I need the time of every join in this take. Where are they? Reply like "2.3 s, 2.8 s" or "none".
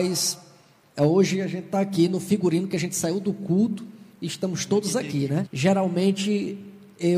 5.4 s